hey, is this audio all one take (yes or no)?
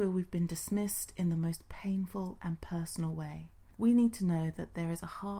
no